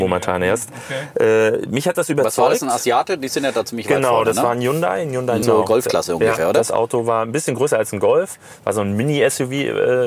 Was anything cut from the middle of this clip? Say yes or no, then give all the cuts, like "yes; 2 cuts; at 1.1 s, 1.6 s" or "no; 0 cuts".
yes; 1 cut; at 5.4 s